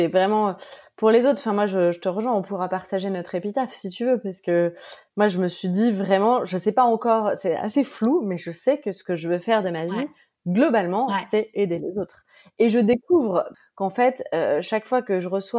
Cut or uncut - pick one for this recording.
uncut